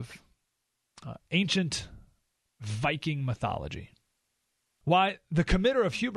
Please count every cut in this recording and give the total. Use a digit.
1